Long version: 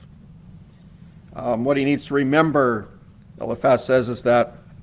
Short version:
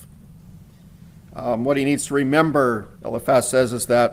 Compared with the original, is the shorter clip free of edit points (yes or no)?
no